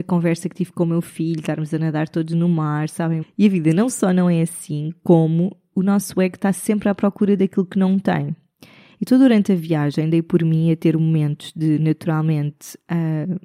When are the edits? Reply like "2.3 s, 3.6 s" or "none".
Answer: 3.2 s